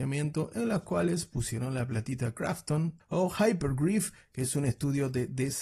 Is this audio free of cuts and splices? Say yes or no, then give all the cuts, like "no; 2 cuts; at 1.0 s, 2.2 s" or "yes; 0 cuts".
no; 1 cut; at 3.0 s